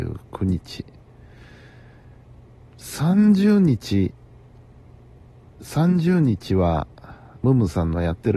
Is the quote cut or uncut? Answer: cut